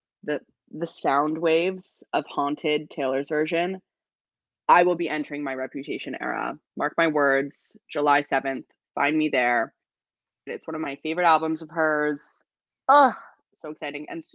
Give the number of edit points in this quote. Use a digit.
1